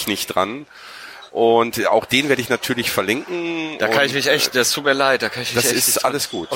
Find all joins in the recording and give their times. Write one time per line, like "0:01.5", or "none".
0:01.3